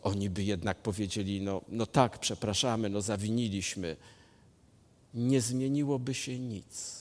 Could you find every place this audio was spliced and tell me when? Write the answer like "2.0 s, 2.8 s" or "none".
none